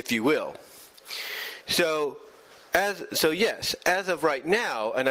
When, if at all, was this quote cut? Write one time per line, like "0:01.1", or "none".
none

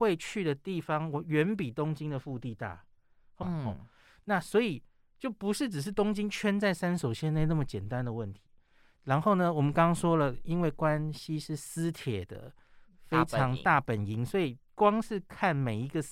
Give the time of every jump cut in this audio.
0:03.4

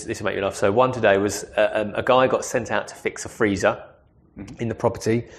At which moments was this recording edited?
none

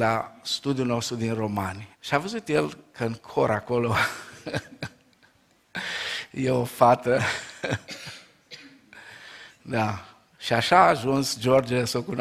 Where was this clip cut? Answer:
0:01.9

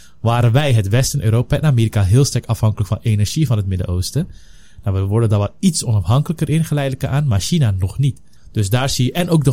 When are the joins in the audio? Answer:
0:08.4

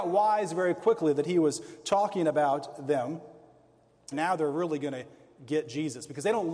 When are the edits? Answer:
0:04.1

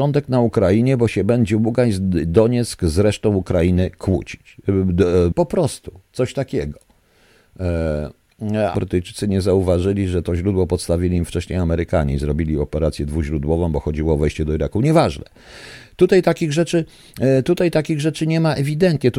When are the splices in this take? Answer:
0:05.3
0:08.7

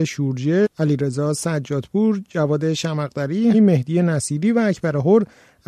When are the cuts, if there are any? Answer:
0:03.5

